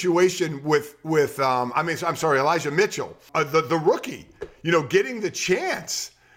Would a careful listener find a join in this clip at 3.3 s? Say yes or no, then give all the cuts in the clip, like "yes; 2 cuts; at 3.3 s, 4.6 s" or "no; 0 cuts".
yes; 1 cut; at 3.3 s